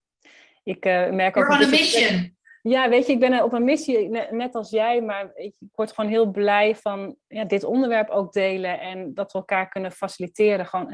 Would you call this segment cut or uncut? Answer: uncut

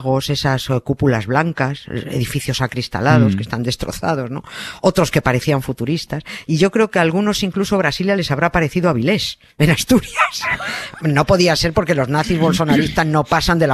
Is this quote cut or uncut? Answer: cut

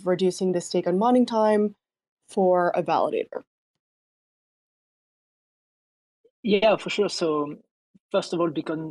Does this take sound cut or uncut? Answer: uncut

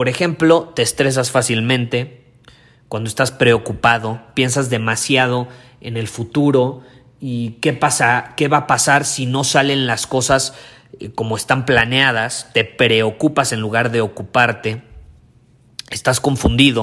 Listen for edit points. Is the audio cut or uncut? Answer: uncut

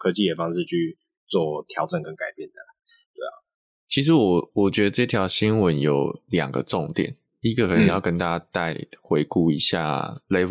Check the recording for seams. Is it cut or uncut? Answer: uncut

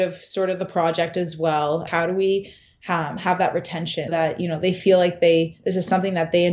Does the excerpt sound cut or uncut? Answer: cut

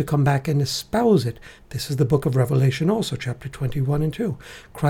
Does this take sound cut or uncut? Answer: uncut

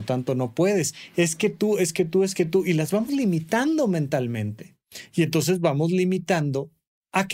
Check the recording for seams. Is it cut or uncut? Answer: uncut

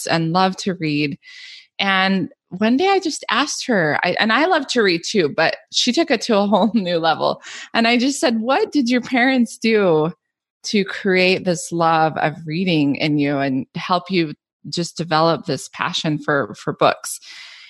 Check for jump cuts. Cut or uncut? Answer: uncut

